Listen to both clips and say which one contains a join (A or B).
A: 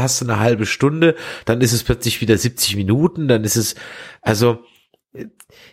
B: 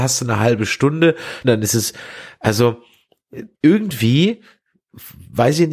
B